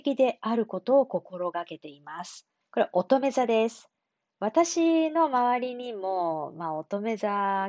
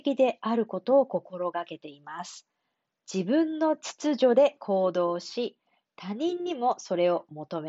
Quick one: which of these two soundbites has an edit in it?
first; 1 cut; at 2.6 s

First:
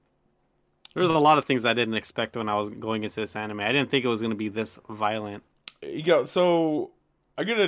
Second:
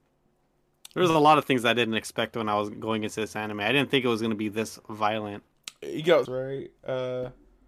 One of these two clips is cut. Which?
second; 1 cut; at 6.3 s

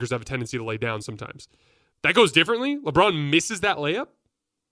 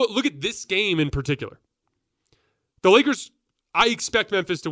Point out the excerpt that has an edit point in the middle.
first; 1 cut; at 1.9 s

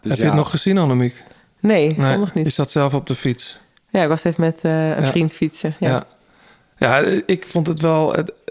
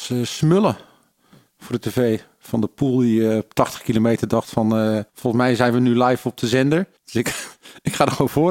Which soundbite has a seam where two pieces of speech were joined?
second; 2 cuts; at 5.1 s, 7.0 s

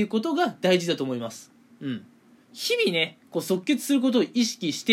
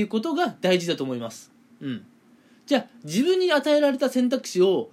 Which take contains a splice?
first; 1 cut; at 2.4 s

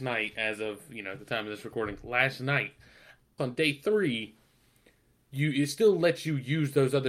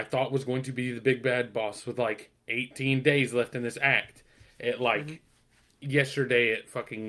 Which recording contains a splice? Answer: first; 1 cut; at 3.4 s

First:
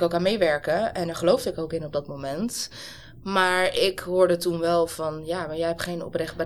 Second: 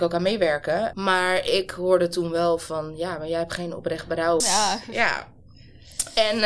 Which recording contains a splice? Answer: second; 2 cuts; at 0.9 s, 4.4 s

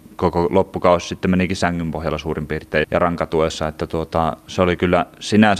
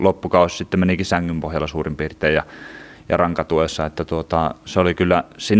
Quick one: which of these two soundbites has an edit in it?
first; 1 cut; at 2.8 s

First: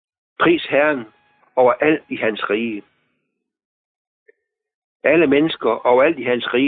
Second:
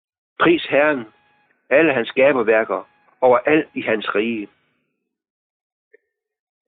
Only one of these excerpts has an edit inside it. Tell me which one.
first; 1 cut; at 1.4 s

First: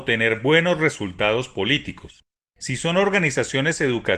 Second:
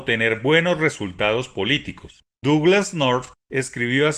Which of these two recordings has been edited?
second; 1 cut; at 2.3 s

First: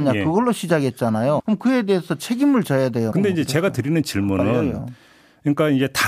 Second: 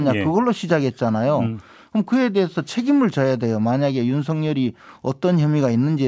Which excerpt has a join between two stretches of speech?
first; 2 cuts; at 1.4 s, 3.1 s

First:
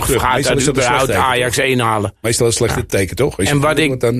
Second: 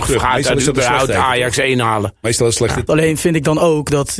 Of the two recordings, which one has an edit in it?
second; 1 cut; at 2.9 s

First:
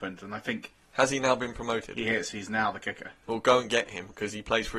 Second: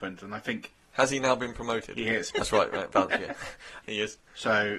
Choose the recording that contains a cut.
second; 2 cuts; at 2.3 s, 3.8 s

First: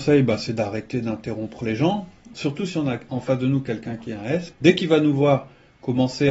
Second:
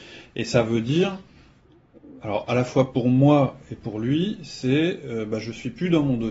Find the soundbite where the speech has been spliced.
first; 2 cuts; at 2.3 s, 4.5 s

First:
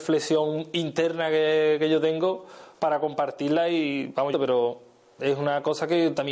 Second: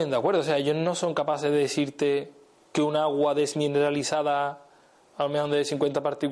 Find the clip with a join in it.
first; 1 cut; at 4.3 s

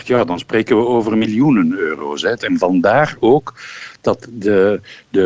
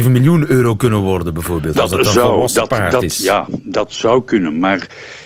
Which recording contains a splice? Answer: first; 1 cut; at 2.4 s

